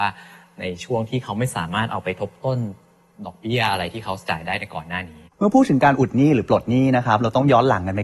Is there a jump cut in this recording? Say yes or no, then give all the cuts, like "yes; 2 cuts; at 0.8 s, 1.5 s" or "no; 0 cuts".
no; 0 cuts